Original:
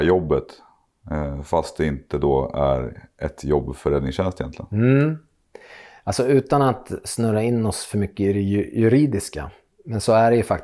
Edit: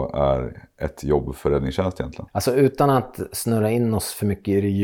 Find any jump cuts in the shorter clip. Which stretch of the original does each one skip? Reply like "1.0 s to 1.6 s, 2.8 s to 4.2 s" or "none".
4.7 s to 6.0 s